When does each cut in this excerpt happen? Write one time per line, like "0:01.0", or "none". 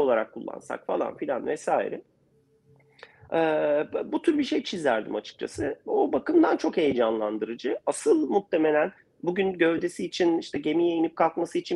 none

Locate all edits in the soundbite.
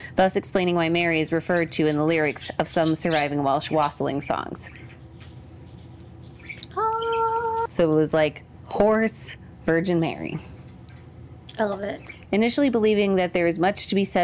0:07.7
0:12.2

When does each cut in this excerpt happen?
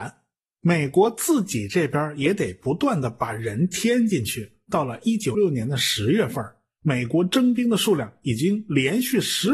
0:05.3

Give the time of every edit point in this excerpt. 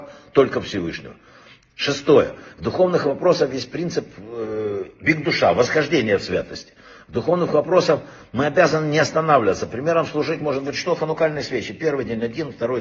none

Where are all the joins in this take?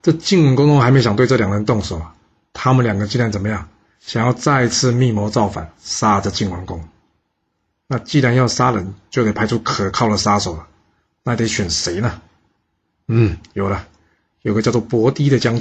none

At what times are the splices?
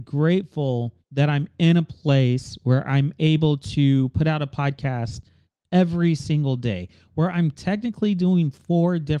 0:01.0

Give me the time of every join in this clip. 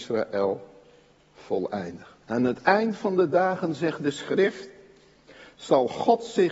0:02.2

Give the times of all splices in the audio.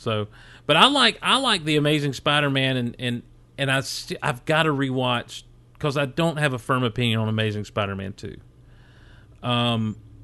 none

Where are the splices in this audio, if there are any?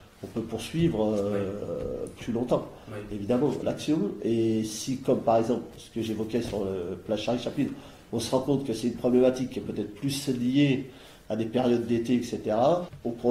0:03.6

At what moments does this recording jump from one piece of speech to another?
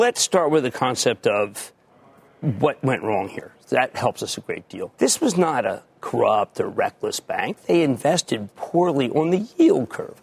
0:04.9

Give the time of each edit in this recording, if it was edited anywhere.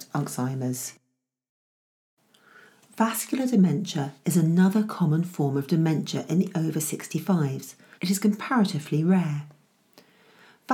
0:07.9

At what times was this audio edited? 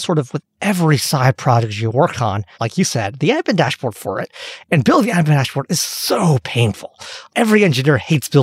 0:02.5

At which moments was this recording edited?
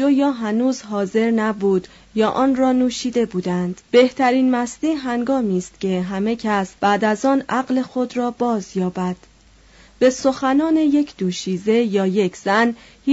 0:03.8
0:06.8

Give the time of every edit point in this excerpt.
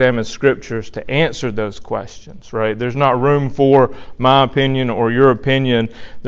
none

